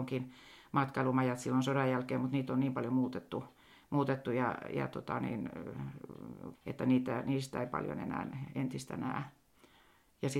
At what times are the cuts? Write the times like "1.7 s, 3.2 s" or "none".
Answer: 6.5 s